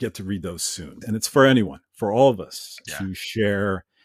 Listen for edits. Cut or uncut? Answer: cut